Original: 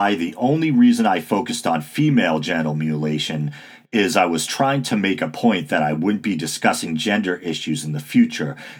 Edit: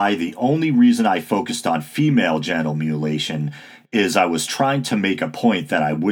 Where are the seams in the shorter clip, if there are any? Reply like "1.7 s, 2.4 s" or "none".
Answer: none